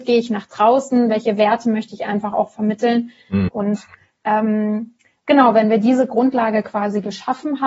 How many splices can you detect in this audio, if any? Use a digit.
1